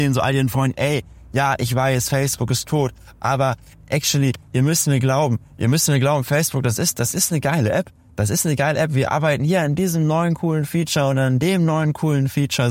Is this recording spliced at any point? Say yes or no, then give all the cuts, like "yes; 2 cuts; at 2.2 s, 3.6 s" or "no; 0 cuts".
no; 0 cuts